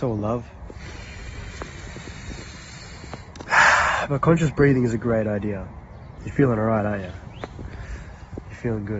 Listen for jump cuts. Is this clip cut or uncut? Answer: cut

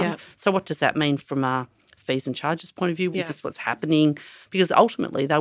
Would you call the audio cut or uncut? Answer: cut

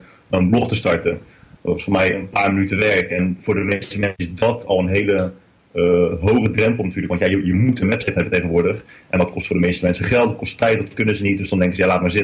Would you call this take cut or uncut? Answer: uncut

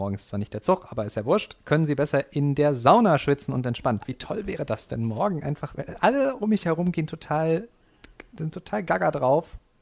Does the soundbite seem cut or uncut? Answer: cut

